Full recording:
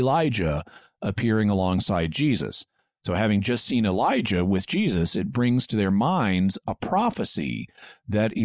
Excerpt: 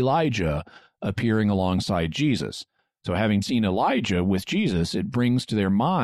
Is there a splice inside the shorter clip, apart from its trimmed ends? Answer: yes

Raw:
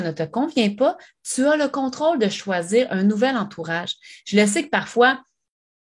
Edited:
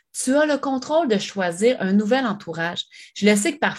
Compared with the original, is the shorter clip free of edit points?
yes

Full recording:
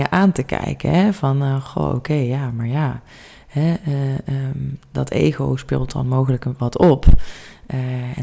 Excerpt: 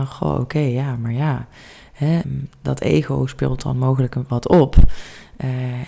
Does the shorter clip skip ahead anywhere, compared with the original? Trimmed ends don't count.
yes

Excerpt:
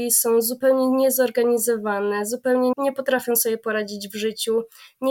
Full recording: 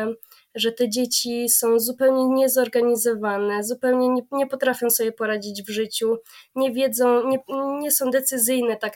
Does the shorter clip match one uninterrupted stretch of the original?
no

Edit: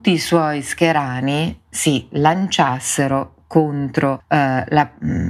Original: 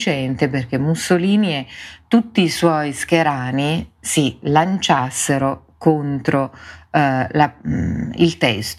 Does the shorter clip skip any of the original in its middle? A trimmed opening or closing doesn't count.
yes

